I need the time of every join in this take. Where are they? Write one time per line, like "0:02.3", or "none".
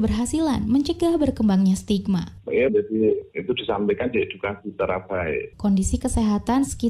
0:02.7
0:05.5